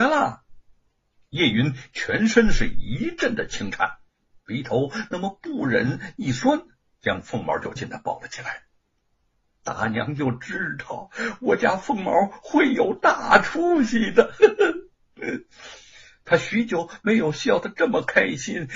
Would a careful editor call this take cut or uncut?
cut